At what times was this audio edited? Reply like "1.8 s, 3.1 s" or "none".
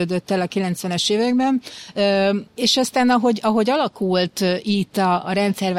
2.5 s